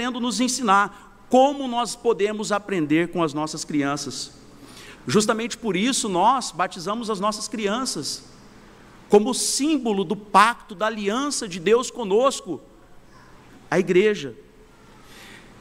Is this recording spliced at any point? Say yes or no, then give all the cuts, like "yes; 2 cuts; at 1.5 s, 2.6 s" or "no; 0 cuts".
yes; 2 cuts; at 4.9 s, 13.5 s